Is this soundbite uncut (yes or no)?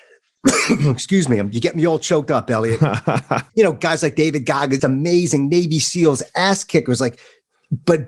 no